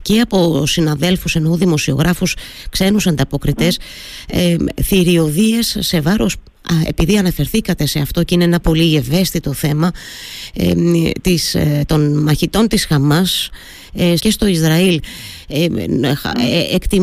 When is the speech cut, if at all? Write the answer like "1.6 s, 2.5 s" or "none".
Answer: 8.6 s, 14.2 s